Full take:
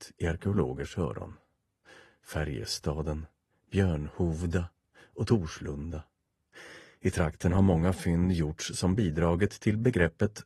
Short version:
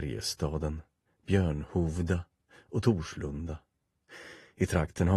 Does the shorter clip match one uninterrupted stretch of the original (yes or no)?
yes